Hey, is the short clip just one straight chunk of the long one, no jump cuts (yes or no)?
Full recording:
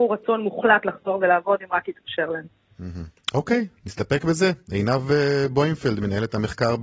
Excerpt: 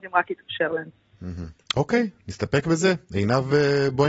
yes